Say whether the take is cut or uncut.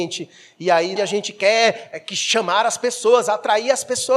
cut